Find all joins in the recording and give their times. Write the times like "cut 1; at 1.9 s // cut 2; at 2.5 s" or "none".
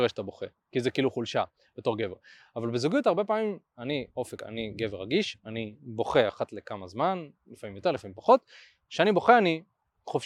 none